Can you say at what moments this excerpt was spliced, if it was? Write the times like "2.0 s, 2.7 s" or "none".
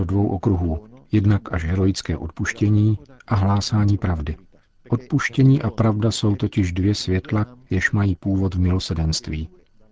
none